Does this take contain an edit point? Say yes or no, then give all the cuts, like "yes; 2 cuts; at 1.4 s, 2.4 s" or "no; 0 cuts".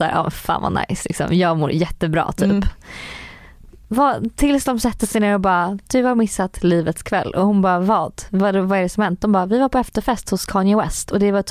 no; 0 cuts